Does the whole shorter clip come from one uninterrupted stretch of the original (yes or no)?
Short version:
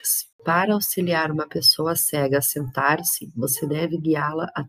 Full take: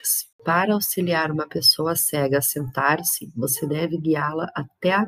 yes